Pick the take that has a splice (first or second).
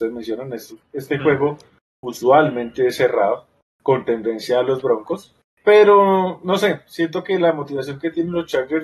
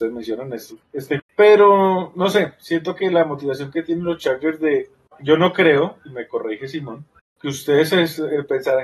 second